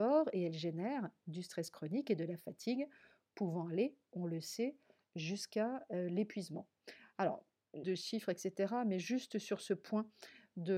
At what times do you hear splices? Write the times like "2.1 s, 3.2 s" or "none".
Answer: 7.8 s